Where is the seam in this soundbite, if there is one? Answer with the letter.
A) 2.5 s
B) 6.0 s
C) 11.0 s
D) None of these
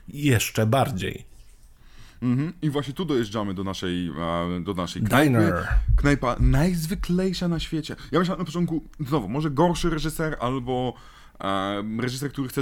D